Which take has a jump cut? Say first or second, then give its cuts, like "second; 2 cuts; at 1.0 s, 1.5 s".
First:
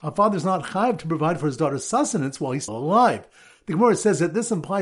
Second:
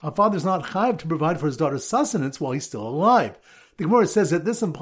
first; 1 cut; at 2.7 s